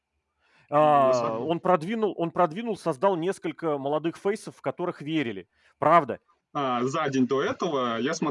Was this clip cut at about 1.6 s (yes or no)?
no